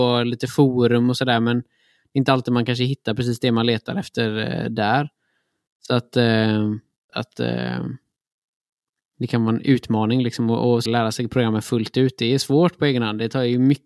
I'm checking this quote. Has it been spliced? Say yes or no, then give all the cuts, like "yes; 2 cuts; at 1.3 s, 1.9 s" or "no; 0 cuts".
yes; 2 cuts; at 7.1 s, 10.9 s